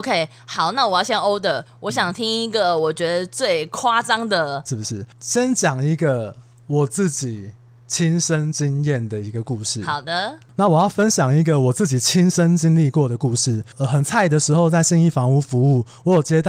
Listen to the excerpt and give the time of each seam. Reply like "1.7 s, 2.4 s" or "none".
4.7 s